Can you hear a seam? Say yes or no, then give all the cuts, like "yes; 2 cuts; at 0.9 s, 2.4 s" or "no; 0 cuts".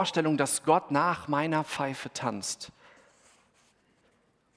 no; 0 cuts